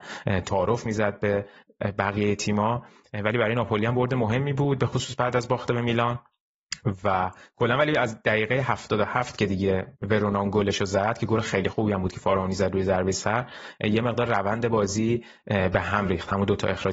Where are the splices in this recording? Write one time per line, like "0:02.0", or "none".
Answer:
0:09.9